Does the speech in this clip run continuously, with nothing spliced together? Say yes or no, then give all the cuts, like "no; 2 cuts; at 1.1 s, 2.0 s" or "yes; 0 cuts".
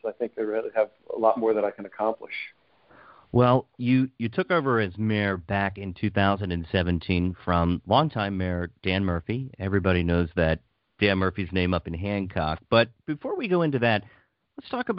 yes; 0 cuts